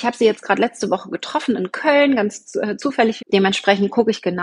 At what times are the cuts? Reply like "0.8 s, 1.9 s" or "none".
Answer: 3.2 s